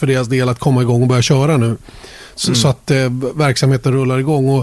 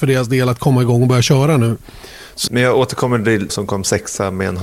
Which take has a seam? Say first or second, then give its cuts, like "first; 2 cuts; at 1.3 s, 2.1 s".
second; 2 cuts; at 2.5 s, 3.5 s